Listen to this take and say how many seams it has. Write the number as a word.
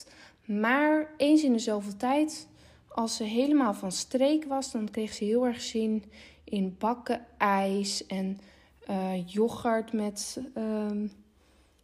zero